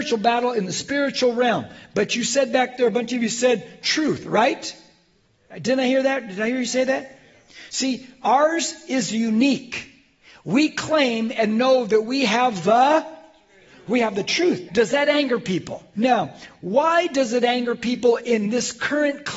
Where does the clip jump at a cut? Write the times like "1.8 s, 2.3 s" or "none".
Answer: 14.7 s, 15.9 s